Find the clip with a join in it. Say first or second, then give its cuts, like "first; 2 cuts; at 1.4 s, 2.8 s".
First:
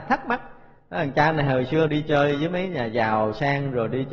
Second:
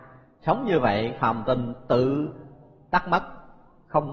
first; 1 cut; at 1.9 s